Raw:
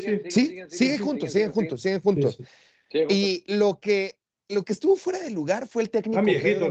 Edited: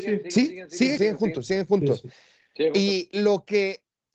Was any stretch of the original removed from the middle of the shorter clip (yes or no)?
yes